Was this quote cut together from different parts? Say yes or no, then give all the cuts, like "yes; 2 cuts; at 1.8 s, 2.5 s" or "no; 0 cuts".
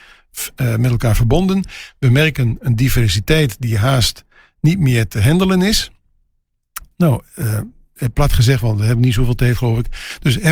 no; 0 cuts